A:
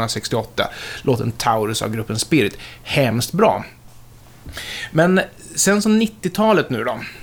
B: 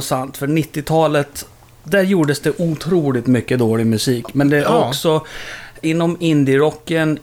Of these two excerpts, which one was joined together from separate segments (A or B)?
B